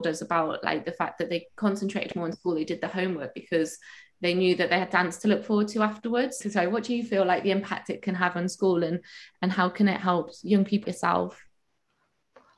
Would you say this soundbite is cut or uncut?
cut